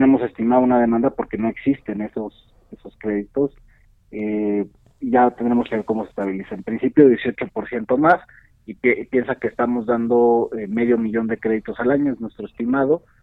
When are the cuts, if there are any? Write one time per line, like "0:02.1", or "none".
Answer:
none